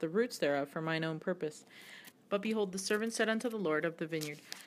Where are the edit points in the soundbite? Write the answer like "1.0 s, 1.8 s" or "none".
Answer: 2.1 s